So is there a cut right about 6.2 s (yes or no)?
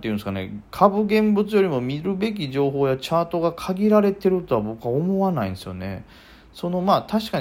no